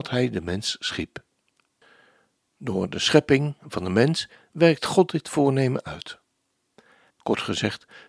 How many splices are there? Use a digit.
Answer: 1